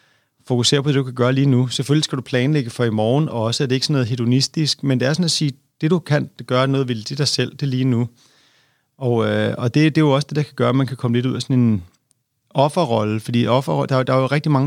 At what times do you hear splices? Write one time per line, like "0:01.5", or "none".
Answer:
none